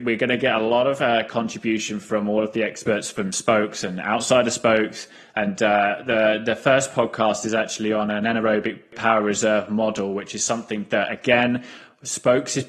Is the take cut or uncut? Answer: uncut